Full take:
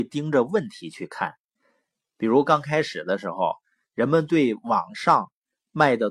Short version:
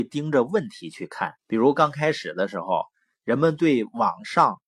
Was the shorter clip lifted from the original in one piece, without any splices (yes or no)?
no